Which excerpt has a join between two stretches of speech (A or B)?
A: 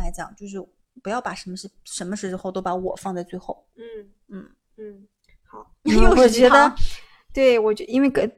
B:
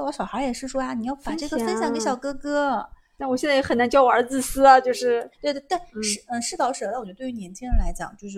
A